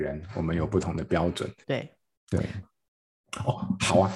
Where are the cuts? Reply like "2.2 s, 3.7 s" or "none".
1.6 s, 2.6 s